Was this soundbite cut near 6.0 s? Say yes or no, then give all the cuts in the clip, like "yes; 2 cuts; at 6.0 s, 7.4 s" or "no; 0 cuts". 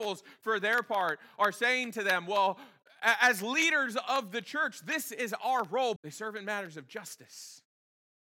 yes; 1 cut; at 6.0 s